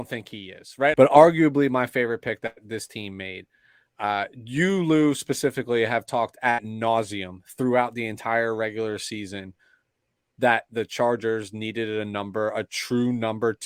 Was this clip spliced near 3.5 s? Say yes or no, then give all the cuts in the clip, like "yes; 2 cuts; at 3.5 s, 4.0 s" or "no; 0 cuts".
no; 1 cut; at 0.9 s